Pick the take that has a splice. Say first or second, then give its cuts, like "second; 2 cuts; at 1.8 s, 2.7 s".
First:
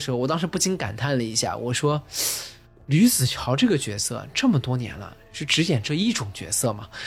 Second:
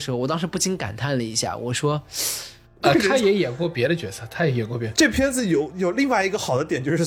second; 1 cut; at 2.8 s